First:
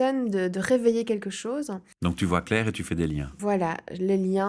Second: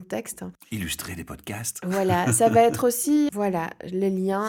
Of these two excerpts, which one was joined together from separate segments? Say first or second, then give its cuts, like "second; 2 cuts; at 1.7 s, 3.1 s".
second; 1 cut; at 3.3 s